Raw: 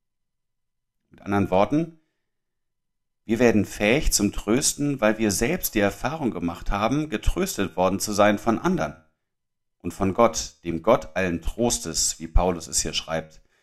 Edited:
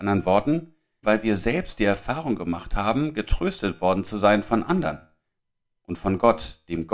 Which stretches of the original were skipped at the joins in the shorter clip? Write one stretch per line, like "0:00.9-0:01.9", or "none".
0:02.3-0:05.0